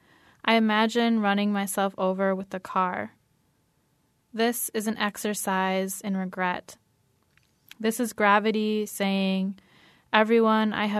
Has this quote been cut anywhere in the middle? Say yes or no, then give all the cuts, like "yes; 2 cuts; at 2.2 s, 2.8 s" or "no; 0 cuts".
no; 0 cuts